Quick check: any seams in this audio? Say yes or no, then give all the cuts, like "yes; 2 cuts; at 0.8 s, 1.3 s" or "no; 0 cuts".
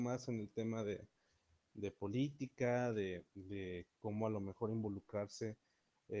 no; 0 cuts